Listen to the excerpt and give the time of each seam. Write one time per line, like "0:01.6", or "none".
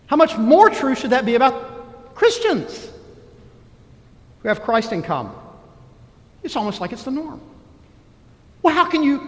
0:06.3